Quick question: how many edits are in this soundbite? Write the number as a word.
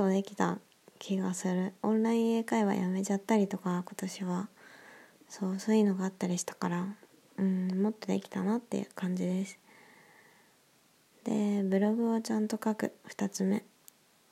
zero